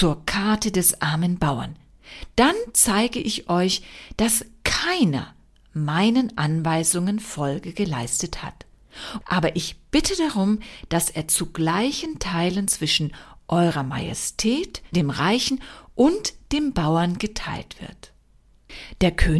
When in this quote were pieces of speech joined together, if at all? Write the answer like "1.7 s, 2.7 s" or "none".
9.2 s, 14.9 s